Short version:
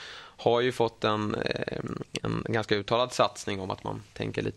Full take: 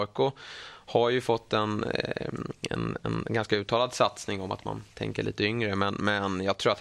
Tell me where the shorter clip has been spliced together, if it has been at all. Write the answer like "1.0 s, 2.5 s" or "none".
2.2 s